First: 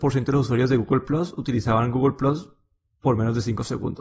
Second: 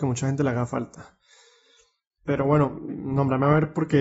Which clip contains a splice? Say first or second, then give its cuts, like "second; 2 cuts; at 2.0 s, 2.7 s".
second; 1 cut; at 2.9 s